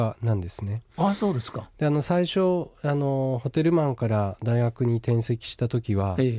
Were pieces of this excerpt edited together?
no; 0 cuts

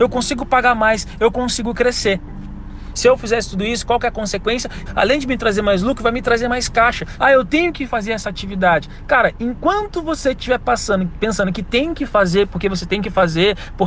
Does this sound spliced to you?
yes; 3 cuts; at 2.9 s, 4.9 s, 7.2 s

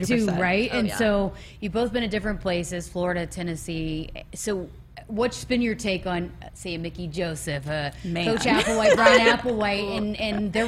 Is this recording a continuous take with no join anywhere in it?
yes; 0 cuts

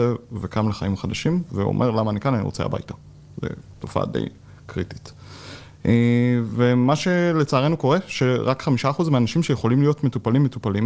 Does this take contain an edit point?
no; 0 cuts

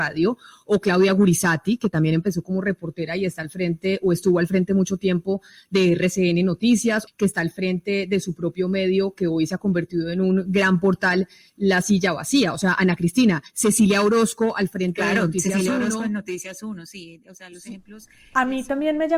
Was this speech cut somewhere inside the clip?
yes; 1 cut; at 7.1 s

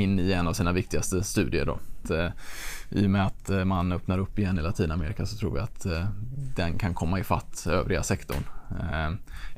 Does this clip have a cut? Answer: yes; 1 cut; at 2.0 s

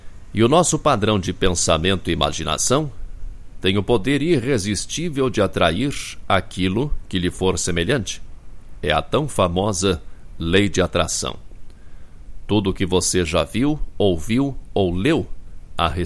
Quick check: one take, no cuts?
yes; 0 cuts

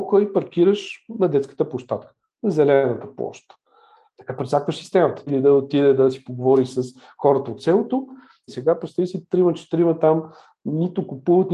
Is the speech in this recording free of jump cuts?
no; 2 cuts; at 5.3 s, 8.5 s

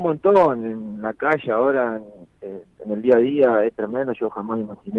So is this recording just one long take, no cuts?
yes; 0 cuts

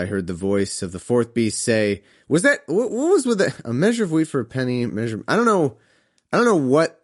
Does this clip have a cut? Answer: no; 0 cuts

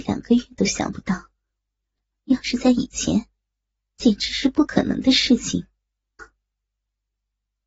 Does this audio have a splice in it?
yes; 1 cut; at 6.2 s

